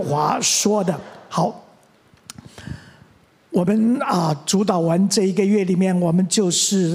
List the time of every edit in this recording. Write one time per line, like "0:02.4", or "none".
none